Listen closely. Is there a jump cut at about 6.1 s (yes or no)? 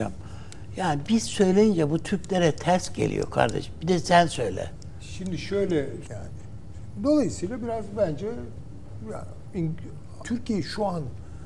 yes